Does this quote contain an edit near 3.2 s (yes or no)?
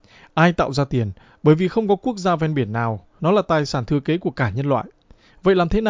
yes